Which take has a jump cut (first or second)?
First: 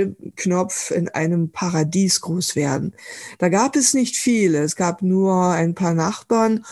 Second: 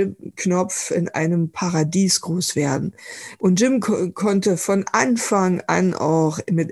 second